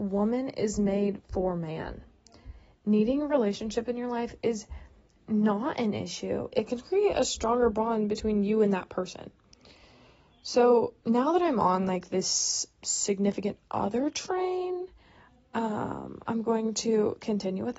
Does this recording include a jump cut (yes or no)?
yes